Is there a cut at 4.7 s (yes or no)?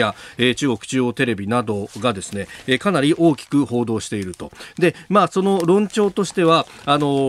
no